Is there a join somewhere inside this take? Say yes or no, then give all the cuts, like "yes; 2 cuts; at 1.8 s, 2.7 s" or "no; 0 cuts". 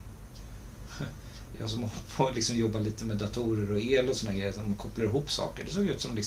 no; 0 cuts